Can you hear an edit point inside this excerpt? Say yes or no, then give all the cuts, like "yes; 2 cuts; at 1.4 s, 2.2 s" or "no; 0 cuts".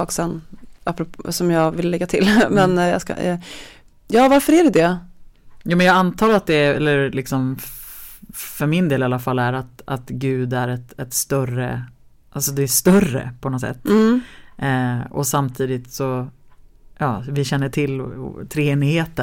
no; 0 cuts